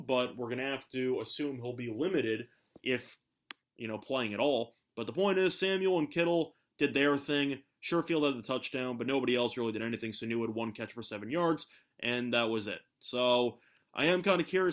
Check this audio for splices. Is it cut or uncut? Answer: uncut